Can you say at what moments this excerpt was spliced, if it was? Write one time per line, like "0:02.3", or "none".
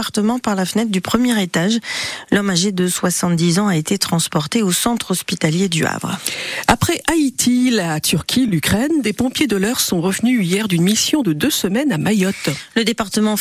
none